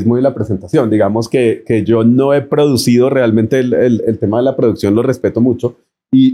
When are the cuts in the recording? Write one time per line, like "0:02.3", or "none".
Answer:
none